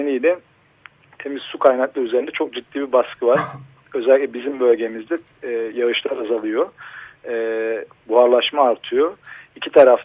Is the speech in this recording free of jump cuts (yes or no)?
yes